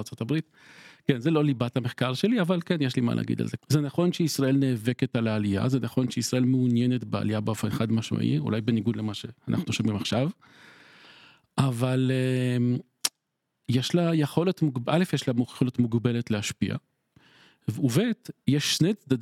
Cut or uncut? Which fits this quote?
cut